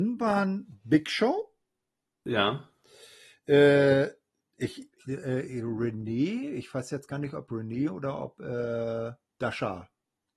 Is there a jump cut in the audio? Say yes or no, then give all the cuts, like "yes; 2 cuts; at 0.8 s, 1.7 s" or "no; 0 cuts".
yes; 1 cut; at 5.0 s